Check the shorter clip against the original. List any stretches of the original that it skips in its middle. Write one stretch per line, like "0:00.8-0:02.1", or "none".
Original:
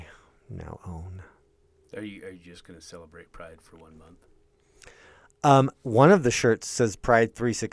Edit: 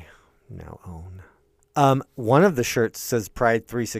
0:01.6-0:05.3